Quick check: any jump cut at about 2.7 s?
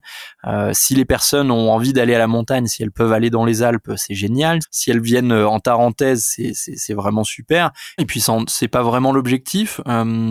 no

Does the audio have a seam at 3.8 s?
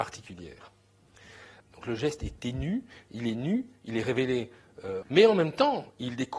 no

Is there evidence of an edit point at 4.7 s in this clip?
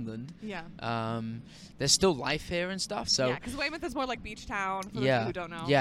no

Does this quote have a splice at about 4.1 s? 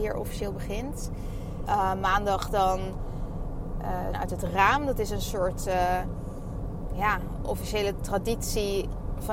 yes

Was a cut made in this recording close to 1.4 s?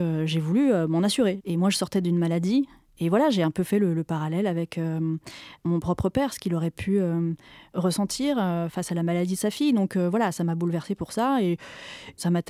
yes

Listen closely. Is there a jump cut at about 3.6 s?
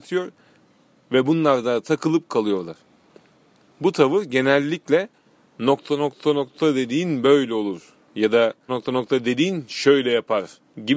no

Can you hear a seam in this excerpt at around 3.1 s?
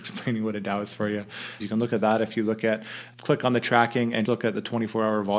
yes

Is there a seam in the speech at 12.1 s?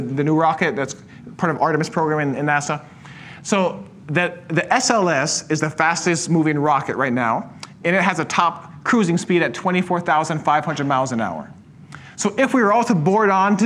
no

